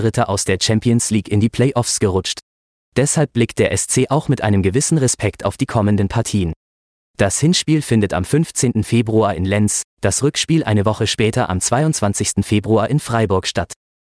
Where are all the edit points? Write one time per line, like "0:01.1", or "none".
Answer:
0:02.8